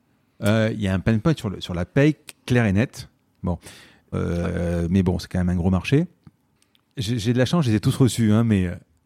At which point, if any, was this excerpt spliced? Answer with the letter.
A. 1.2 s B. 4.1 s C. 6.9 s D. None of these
B